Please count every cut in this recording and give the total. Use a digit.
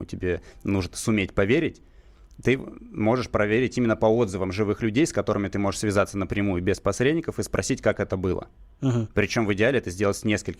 0